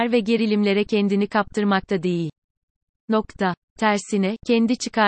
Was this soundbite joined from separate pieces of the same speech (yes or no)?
no